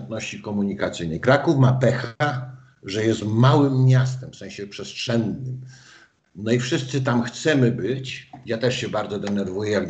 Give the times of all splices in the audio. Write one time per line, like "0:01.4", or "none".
none

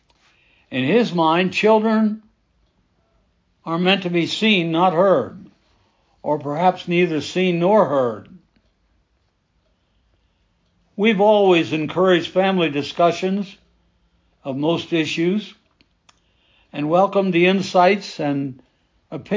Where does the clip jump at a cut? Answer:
none

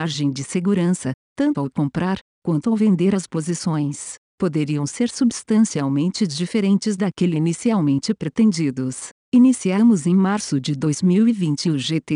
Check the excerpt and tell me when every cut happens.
0:01.2

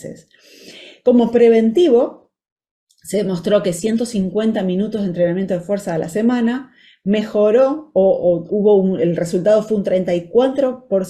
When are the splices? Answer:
0:08.5

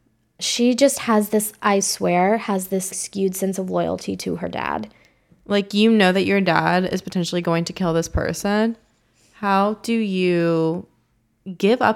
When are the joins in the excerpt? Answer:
0:02.9

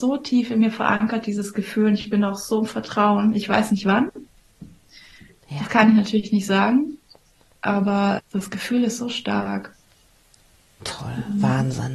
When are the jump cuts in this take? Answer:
0:08.2

